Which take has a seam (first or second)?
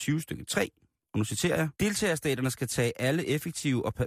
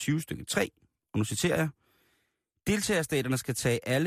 first